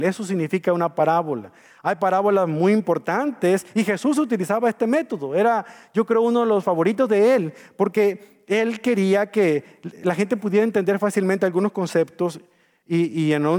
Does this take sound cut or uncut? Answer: uncut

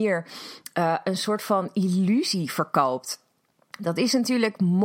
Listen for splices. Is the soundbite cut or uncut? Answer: uncut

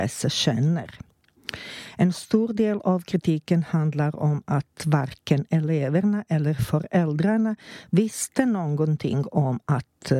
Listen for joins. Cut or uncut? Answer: uncut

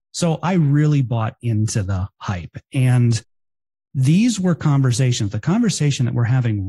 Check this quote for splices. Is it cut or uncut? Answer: uncut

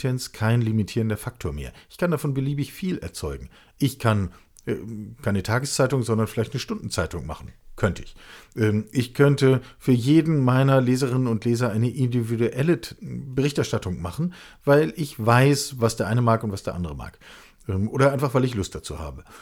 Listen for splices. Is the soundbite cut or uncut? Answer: uncut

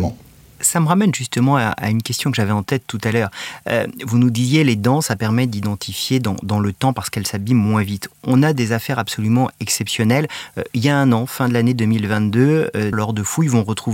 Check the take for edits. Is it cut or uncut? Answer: cut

